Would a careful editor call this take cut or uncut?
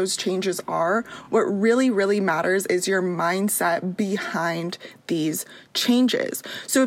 uncut